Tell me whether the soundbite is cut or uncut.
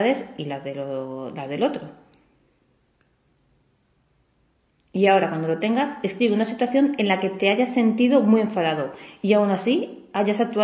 uncut